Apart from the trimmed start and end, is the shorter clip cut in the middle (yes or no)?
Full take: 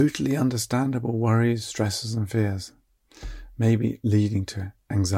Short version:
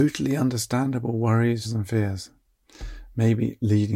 yes